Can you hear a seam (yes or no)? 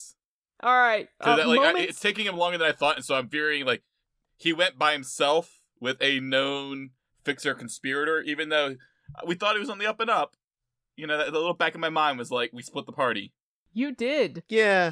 no